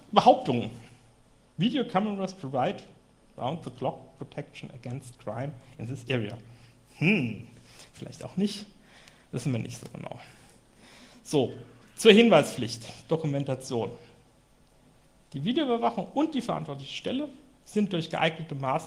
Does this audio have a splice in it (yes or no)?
no